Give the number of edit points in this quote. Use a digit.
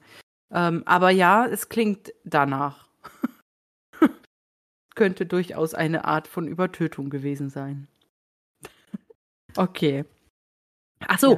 0